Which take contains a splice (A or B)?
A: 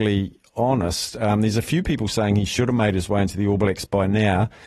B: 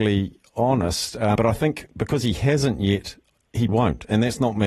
B